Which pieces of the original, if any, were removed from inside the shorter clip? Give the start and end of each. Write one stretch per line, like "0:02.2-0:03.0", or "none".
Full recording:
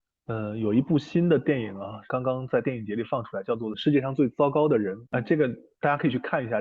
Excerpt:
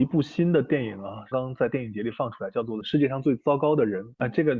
0:02.1-0:02.2

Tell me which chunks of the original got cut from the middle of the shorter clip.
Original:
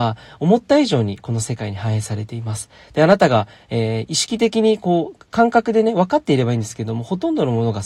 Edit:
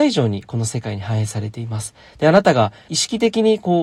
0:03.6-0:04.1

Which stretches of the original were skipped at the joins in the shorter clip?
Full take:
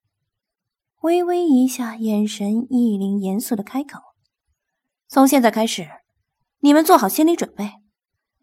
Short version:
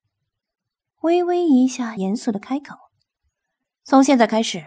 0:02.0-0:03.2

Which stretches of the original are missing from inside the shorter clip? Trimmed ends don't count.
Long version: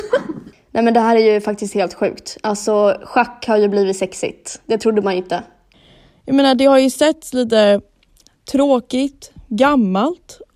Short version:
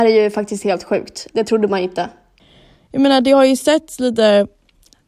0:02.4-0:04.6

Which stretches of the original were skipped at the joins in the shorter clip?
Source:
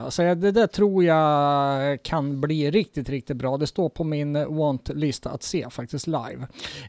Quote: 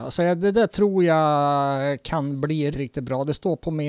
0:02.7-0:03.0

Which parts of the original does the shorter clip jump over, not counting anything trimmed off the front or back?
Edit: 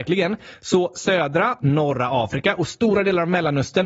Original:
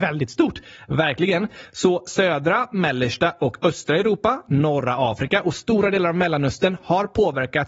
0:02.7-0:04.4

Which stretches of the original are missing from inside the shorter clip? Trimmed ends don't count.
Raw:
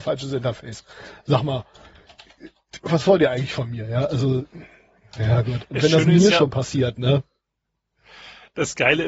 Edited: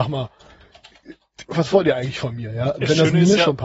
0:04.1-0:05.7

